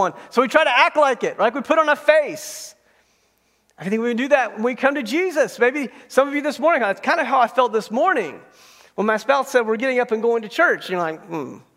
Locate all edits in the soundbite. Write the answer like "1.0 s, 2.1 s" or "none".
none